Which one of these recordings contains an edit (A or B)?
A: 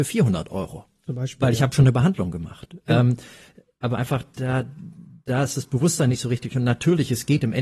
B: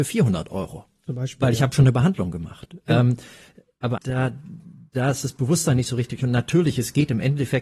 B